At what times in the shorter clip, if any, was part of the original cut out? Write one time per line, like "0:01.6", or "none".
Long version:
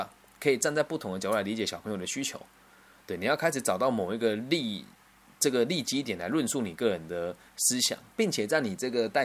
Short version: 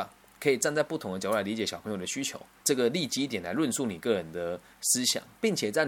0:02.6